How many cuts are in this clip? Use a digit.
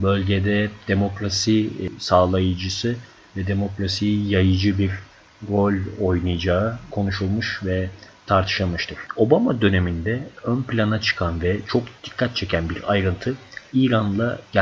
2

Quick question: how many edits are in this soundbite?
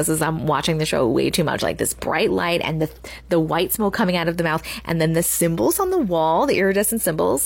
0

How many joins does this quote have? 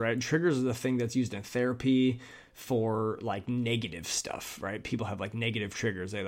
0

